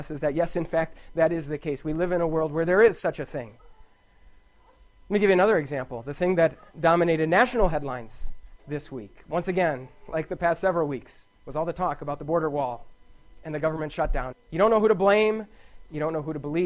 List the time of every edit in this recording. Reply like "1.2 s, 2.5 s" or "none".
11.4 s, 14.3 s